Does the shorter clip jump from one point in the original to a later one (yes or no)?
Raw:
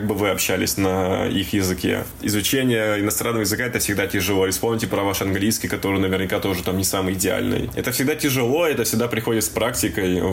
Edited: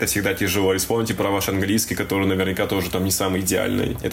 no